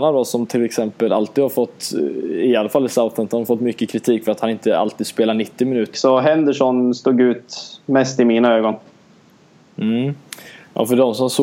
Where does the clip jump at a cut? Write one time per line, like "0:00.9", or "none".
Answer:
0:05.9